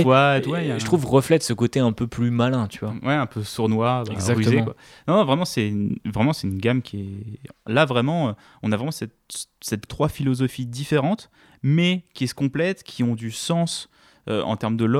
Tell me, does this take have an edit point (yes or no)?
yes